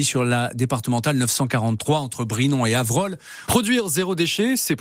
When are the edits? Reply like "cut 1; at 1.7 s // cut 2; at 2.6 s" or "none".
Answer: cut 1; at 3.5 s